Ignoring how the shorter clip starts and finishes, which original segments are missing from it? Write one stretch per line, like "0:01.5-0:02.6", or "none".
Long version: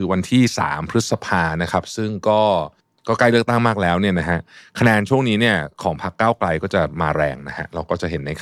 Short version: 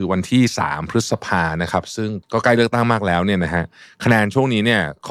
0:02.2-0:03.0